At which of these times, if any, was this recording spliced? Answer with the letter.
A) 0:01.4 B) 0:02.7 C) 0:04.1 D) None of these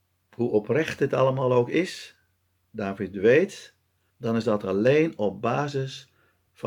C